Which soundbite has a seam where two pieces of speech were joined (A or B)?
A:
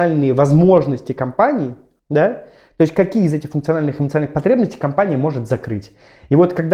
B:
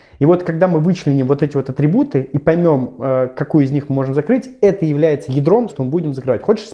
B